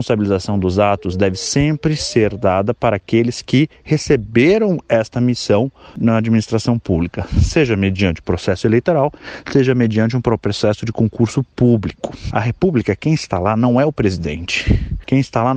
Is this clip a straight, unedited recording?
no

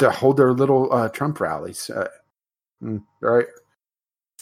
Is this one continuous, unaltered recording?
no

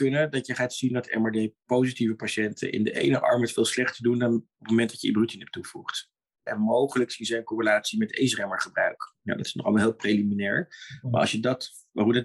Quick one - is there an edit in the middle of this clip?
yes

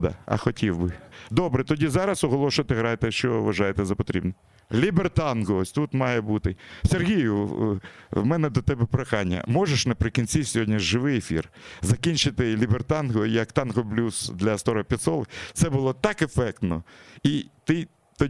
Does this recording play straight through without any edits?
yes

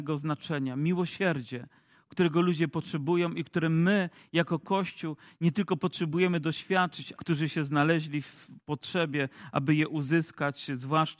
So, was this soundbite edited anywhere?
yes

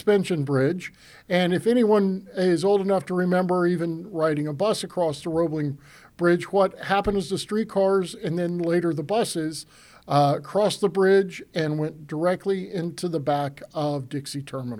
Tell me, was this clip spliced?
no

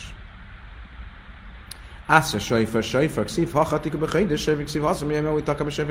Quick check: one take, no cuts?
yes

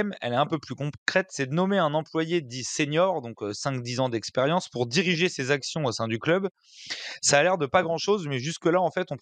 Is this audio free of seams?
yes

